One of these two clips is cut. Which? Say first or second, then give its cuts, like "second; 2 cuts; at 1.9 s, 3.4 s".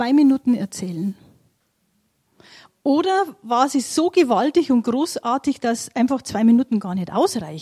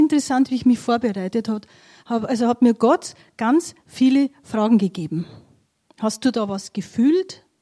second; 1 cut; at 5.8 s